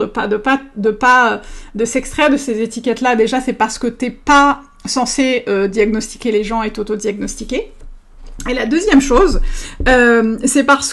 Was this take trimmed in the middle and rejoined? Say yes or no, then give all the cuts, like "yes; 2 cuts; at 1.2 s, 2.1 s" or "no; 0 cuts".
no; 0 cuts